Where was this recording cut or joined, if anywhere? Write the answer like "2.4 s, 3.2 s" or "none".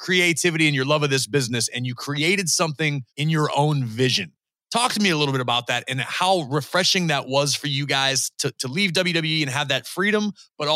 3.1 s